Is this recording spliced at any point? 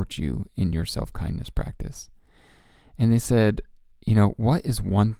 no; 0 cuts

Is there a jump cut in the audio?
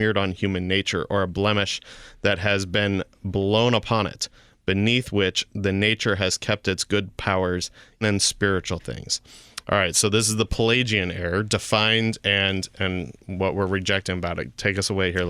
yes; 1 cut; at 8.0 s

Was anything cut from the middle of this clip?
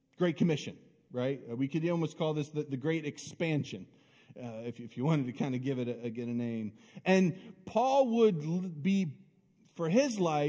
no; 0 cuts

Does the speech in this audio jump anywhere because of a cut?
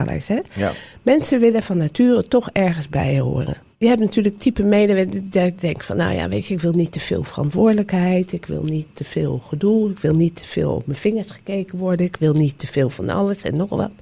no; 0 cuts

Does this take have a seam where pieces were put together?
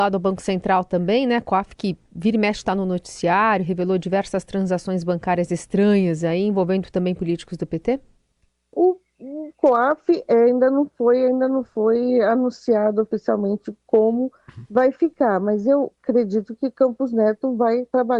no; 0 cuts

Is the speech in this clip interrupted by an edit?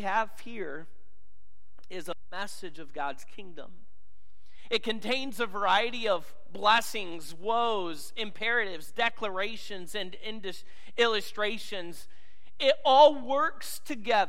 no; 0 cuts

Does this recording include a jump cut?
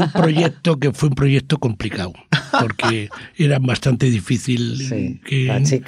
no; 0 cuts

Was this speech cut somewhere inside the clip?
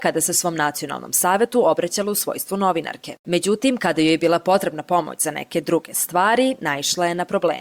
no; 0 cuts

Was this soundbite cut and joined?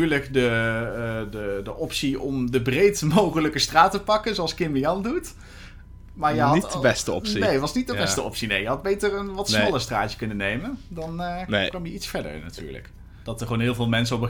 yes; 1 cut; at 13.2 s

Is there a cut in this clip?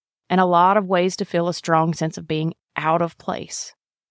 no; 0 cuts

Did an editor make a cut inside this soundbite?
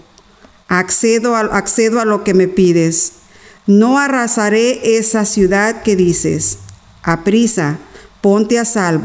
no; 0 cuts

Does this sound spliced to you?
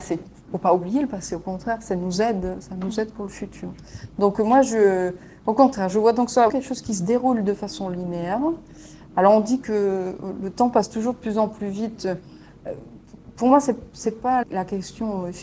yes; 2 cuts; at 6.5 s, 14.4 s

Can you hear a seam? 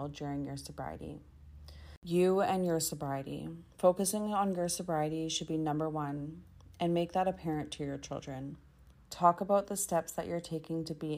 yes; 2 cuts; at 3.7 s, 9.0 s

